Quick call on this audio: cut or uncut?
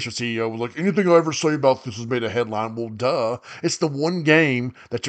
uncut